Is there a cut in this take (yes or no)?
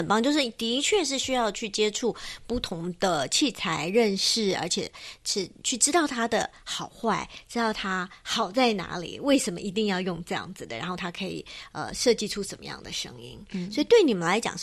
no